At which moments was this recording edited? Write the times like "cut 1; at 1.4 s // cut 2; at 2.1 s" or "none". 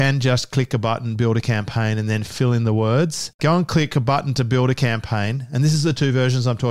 cut 1; at 3.4 s